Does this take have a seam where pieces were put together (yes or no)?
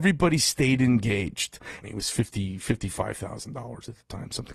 yes